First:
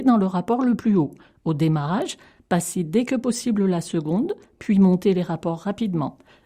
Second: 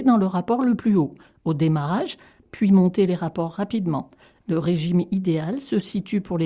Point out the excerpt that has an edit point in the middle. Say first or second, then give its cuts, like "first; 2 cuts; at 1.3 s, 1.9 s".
second; 1 cut; at 2.4 s